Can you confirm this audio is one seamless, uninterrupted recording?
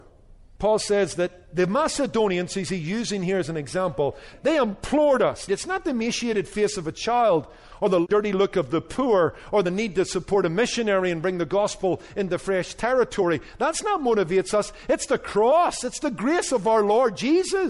no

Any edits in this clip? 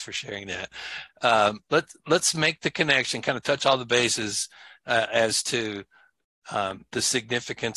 no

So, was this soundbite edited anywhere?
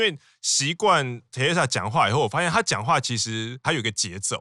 no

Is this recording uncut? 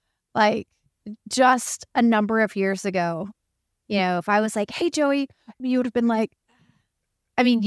no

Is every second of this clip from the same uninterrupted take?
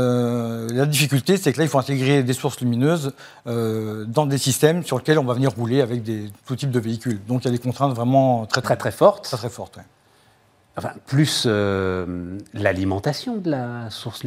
no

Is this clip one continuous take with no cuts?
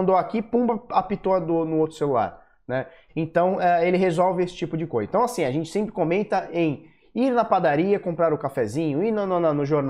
no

